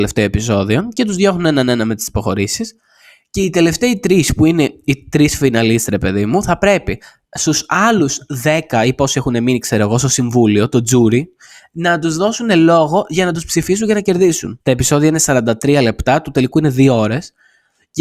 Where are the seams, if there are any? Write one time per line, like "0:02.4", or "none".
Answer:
0:14.6